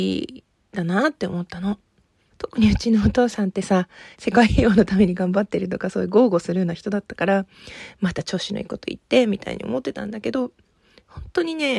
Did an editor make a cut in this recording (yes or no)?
yes